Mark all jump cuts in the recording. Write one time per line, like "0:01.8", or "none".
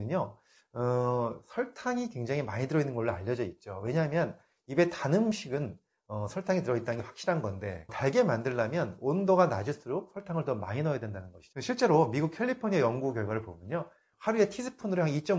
0:07.9
0:11.5